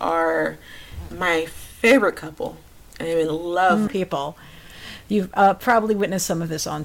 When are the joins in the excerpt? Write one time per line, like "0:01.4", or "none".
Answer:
0:03.9